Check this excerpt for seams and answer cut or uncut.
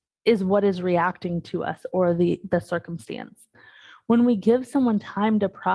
uncut